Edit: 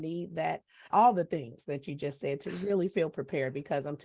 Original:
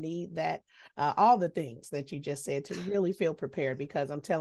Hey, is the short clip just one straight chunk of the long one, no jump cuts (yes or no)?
no